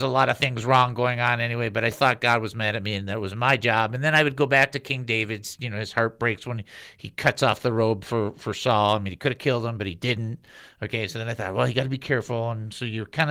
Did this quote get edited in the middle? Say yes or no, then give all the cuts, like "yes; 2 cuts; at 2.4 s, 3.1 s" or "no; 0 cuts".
yes; 1 cut; at 1.9 s